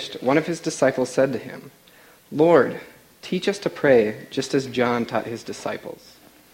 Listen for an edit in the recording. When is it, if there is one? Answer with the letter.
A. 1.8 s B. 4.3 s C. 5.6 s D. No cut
D